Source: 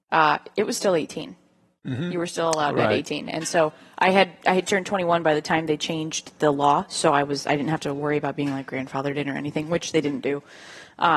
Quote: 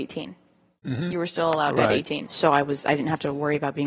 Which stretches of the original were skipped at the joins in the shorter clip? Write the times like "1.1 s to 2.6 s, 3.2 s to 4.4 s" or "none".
3.3 s to 6.9 s